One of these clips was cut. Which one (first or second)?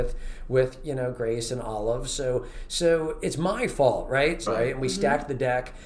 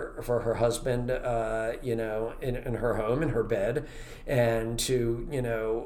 first